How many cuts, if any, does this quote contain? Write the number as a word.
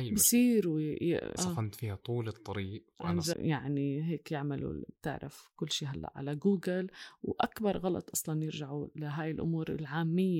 two